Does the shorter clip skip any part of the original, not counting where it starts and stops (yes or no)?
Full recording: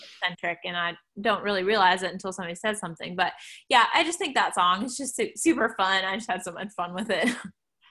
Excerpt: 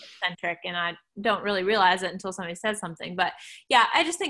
no